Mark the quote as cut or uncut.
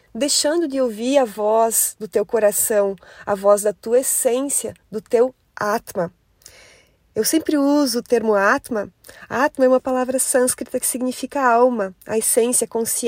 uncut